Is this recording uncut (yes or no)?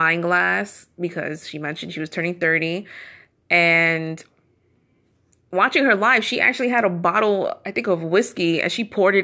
yes